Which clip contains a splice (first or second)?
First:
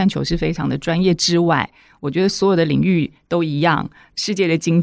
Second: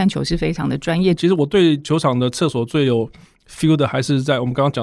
second